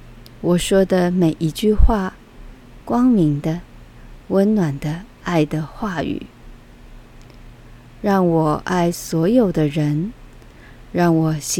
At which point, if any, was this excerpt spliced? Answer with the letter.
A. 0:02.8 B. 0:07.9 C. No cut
A